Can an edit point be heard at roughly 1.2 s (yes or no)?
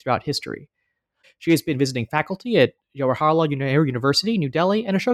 yes